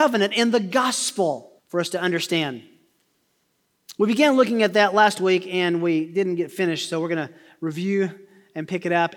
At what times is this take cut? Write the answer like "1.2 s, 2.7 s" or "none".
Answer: 1.6 s